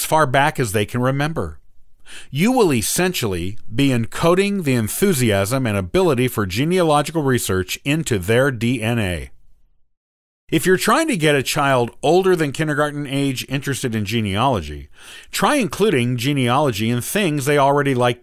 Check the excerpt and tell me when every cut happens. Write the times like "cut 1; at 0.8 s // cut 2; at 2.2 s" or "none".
none

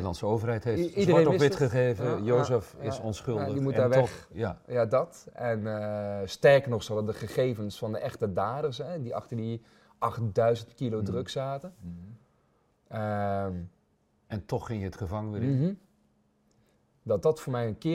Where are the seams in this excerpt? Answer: none

